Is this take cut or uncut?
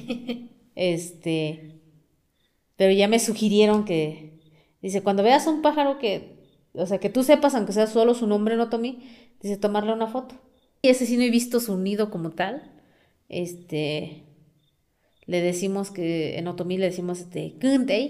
cut